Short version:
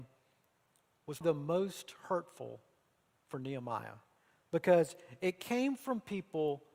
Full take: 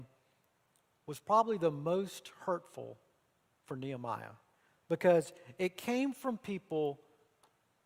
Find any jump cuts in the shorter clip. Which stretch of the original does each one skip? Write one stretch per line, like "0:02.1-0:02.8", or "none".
0:01.2-0:01.6